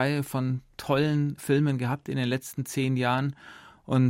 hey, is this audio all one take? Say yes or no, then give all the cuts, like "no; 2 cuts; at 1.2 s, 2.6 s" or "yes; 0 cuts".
yes; 0 cuts